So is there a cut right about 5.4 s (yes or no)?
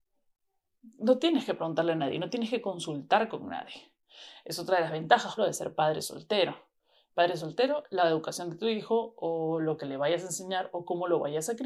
yes